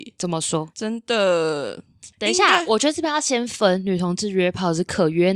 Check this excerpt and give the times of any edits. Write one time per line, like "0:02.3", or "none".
0:02.1

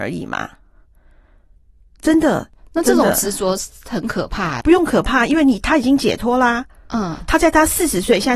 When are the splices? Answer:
0:04.6

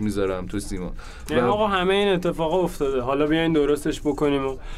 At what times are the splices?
none

